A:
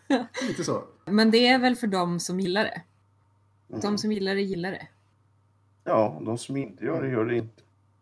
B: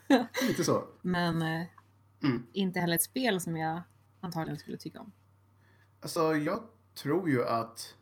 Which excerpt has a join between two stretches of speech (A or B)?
B